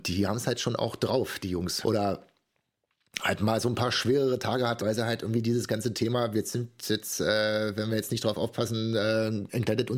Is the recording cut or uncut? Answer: cut